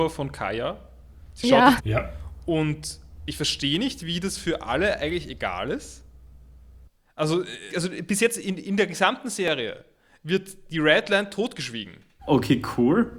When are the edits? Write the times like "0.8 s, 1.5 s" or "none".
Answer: 1.8 s, 7.7 s, 12.2 s

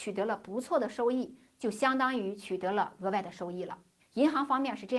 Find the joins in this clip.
4.0 s

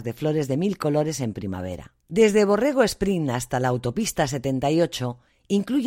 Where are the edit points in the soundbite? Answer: 2.0 s

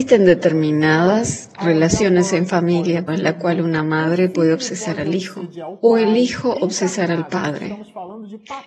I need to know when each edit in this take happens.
3.1 s

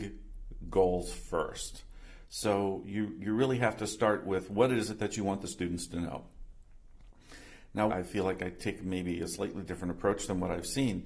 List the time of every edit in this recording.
2.2 s, 7.9 s

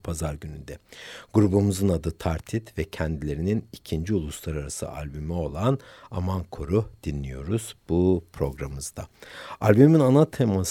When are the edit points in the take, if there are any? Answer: none

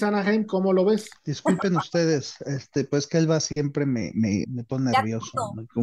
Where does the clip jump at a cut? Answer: 1.2 s, 4.4 s

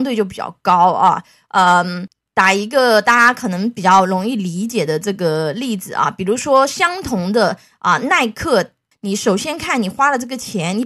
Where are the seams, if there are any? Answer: 8.9 s

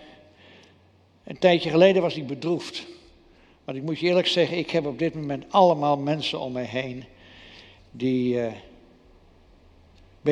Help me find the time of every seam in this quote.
none

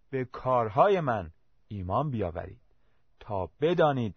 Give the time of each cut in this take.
none

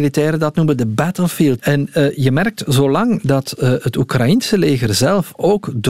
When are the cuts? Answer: 1.6 s

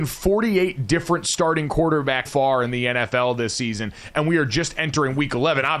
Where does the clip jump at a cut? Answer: 2.2 s

